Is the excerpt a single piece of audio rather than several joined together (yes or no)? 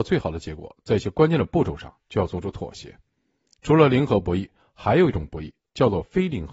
yes